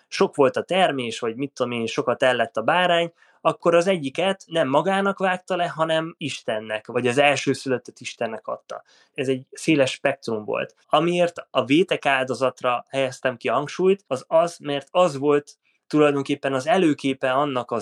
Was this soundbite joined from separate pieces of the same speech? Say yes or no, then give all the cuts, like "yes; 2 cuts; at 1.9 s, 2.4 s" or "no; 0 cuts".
yes; 1 cut; at 10.8 s